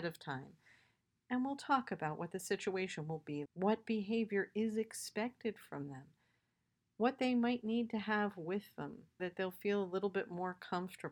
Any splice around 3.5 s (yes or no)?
yes